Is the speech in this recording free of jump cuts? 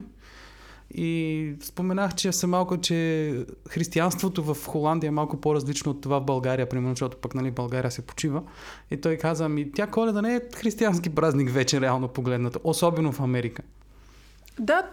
yes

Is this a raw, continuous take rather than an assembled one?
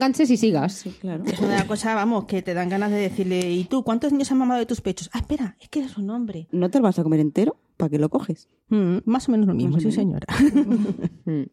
no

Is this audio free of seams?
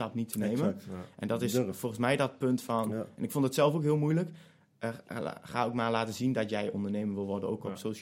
yes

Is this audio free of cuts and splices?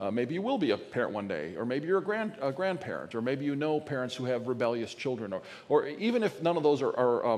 yes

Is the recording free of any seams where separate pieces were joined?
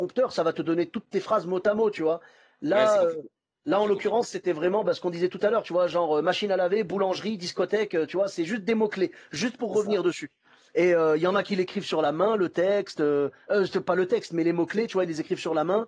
yes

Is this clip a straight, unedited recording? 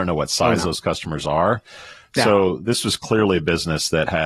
yes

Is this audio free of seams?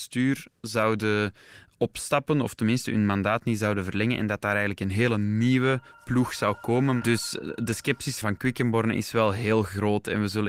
no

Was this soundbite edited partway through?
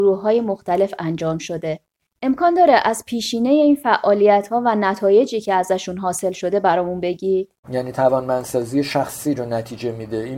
yes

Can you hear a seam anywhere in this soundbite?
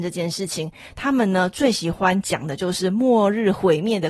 no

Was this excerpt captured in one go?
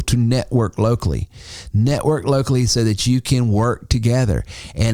yes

